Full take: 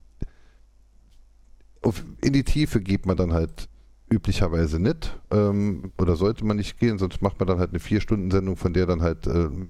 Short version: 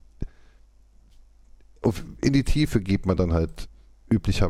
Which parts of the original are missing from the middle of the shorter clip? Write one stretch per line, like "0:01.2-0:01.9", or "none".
none